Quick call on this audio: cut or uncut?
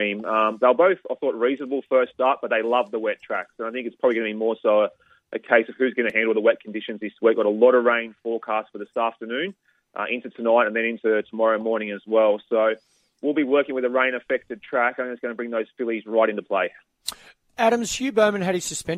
uncut